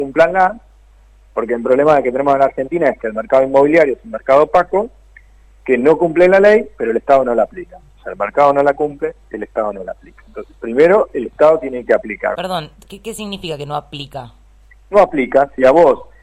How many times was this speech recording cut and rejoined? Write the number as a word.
one